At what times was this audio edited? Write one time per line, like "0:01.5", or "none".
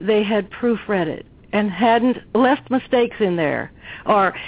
0:02.3